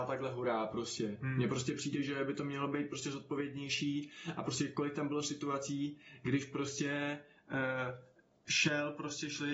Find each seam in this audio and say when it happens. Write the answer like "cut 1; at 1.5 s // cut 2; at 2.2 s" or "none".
none